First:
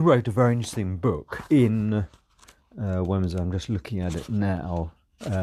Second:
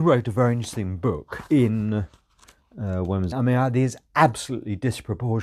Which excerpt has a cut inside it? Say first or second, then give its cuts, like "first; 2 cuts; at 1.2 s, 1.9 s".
second; 1 cut; at 3.3 s